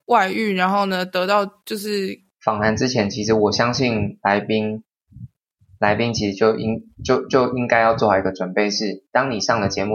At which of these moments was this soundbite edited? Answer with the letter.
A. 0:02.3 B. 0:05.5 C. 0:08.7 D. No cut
A